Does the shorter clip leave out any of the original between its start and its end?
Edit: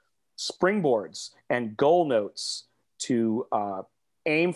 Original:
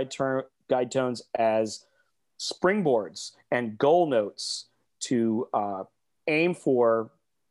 no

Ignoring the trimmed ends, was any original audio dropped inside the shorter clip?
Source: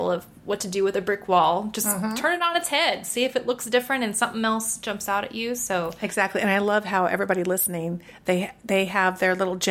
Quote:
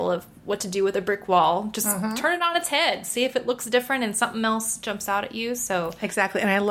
no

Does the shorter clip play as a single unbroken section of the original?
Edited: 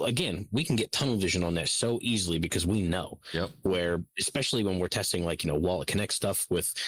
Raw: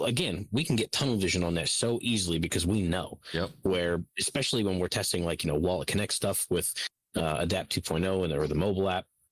yes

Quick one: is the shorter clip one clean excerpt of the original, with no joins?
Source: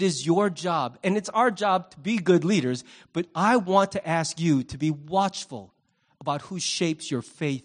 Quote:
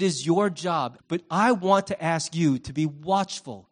no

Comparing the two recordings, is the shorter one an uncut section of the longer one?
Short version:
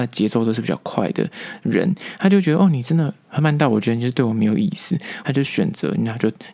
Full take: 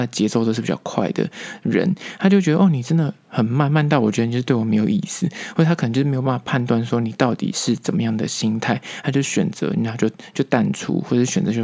no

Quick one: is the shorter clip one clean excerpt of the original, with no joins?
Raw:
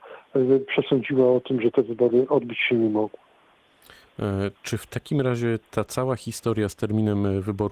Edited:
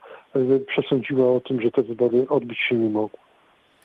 yes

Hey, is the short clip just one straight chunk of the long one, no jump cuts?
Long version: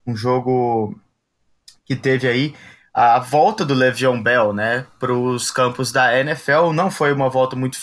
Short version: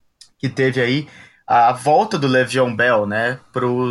yes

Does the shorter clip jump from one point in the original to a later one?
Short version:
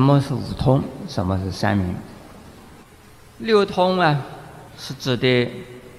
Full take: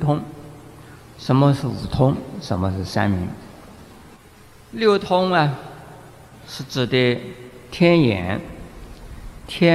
yes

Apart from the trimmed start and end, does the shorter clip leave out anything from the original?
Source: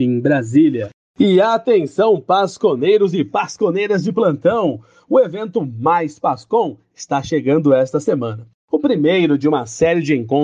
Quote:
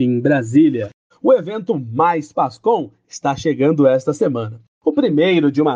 yes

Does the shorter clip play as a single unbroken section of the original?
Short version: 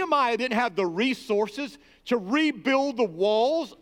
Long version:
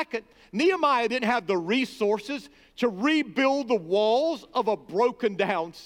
yes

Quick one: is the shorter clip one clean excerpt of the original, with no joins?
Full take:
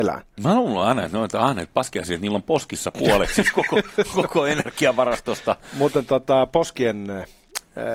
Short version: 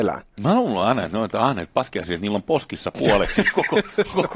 yes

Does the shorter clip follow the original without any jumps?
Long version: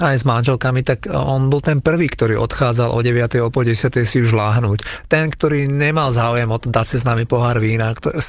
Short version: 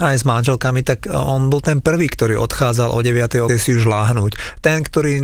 no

